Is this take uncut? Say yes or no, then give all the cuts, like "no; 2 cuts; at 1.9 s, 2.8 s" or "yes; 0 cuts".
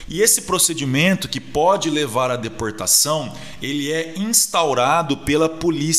yes; 0 cuts